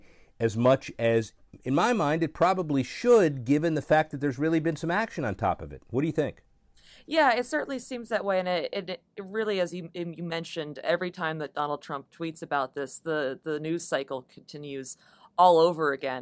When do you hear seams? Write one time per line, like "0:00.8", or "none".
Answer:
none